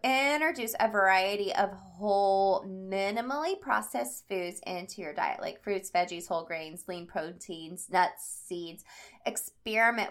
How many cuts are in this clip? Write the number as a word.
zero